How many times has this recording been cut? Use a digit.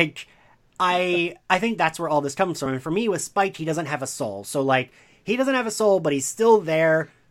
0